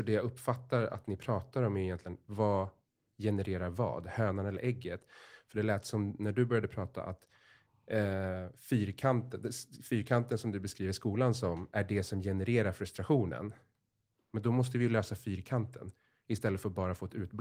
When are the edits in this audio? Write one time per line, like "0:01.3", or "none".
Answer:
none